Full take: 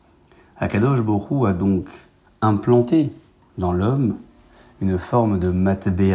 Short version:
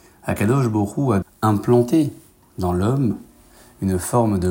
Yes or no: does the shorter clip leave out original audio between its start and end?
yes